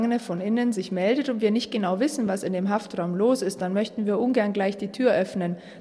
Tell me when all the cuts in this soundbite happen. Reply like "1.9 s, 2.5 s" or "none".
none